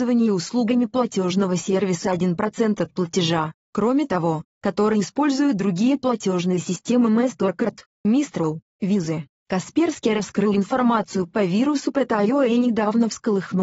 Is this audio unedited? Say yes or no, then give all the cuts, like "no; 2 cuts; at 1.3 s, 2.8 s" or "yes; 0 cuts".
no; 1 cut; at 4.5 s